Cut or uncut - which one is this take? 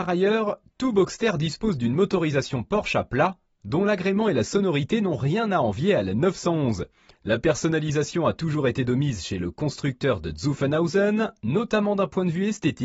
cut